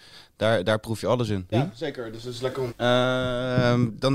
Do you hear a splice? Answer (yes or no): yes